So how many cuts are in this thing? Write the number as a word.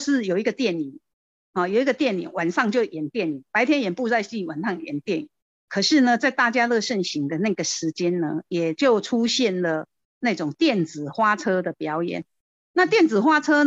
zero